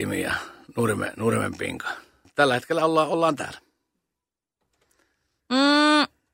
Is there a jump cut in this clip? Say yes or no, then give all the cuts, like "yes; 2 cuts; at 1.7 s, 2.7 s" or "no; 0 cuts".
yes; 1 cut; at 2.2 s